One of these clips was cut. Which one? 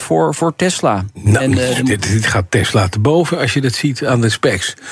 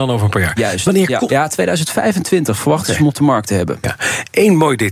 second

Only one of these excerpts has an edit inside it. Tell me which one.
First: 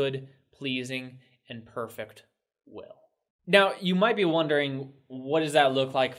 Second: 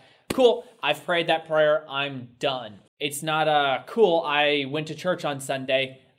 second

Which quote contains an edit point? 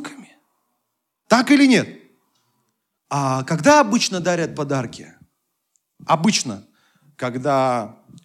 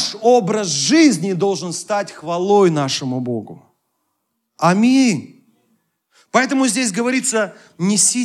first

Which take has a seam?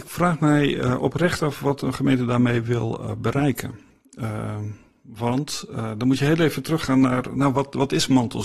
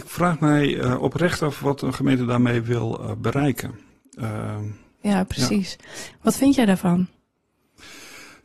second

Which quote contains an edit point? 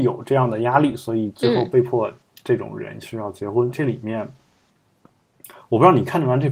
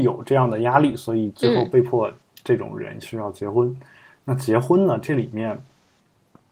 first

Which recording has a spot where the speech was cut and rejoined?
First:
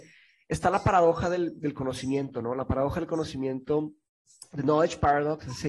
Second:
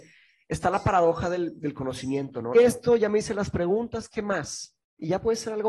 second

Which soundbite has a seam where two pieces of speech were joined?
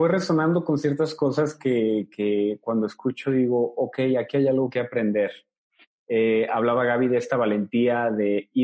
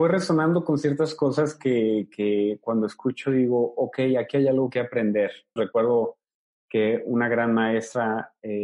second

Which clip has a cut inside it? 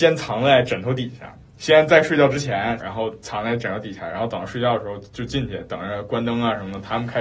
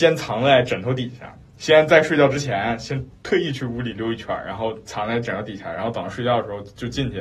first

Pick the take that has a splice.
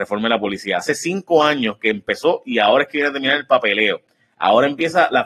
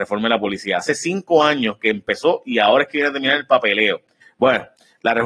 second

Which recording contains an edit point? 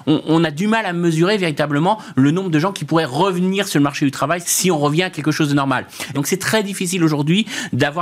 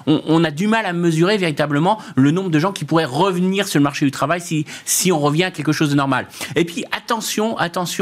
first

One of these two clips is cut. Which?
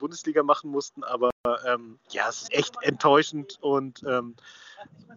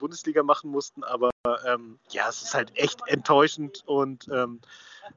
first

